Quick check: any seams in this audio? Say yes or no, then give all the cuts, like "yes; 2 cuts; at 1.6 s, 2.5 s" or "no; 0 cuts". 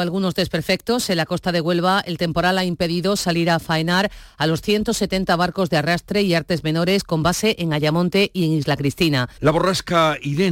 yes; 1 cut; at 9.4 s